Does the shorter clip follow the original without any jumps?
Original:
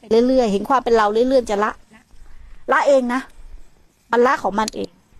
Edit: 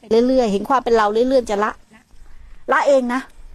yes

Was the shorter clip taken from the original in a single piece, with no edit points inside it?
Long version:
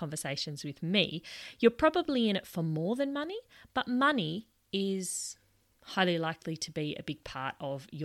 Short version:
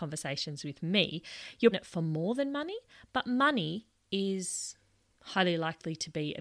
no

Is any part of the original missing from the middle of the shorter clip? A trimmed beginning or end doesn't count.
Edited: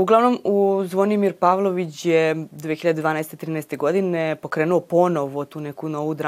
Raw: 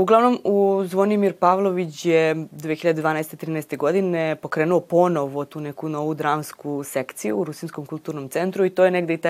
no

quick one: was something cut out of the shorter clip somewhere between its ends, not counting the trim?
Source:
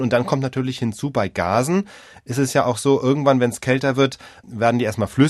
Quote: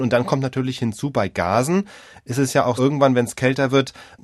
yes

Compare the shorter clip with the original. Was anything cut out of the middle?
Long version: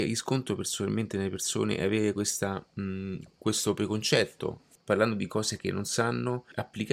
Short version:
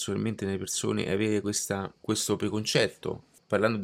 yes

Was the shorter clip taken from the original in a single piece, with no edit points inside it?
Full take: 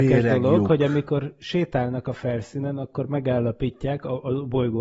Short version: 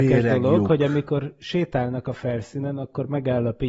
yes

